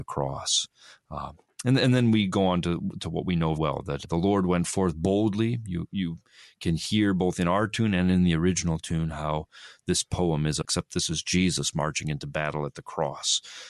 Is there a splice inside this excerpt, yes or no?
yes